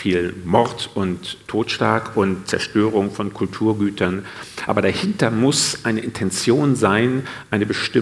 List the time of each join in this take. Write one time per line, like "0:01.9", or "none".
none